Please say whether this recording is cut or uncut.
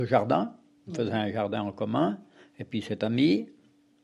uncut